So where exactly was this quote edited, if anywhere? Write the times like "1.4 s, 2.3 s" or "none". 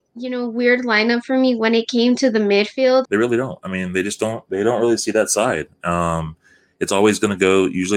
3.0 s

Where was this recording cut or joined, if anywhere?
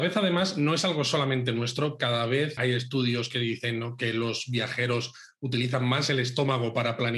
2.6 s

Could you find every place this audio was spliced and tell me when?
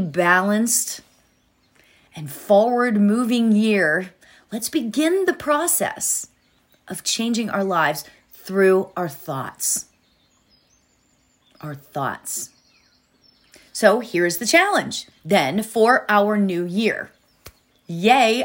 none

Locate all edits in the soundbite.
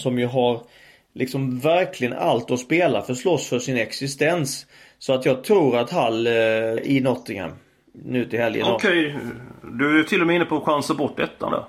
6.8 s

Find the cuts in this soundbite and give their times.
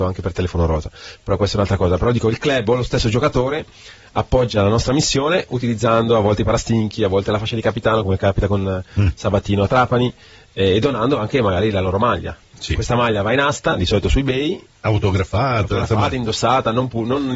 none

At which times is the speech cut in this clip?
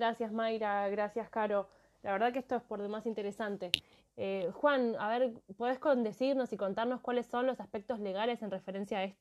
4.0 s

